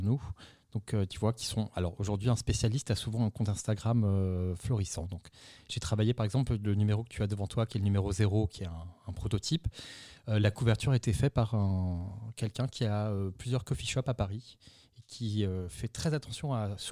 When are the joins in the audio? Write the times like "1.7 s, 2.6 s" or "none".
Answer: none

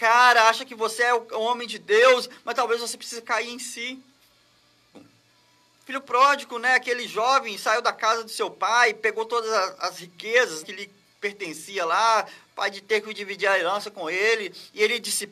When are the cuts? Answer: 4.9 s, 10.6 s

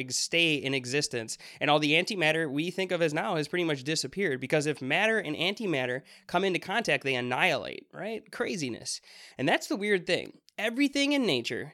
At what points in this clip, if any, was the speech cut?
9.3 s

